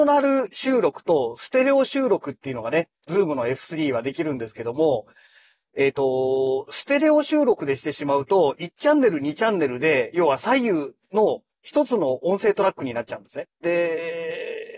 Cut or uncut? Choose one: cut